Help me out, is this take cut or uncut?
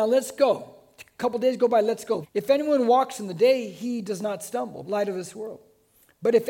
cut